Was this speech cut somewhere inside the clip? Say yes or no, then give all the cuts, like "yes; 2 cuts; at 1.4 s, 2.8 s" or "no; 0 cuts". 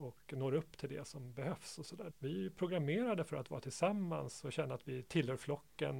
yes; 1 cut; at 2.1 s